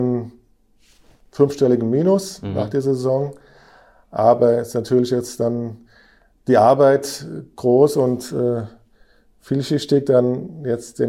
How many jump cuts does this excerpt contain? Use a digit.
0